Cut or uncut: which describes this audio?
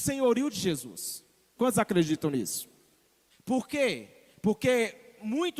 cut